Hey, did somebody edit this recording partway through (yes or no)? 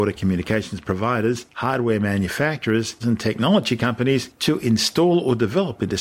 yes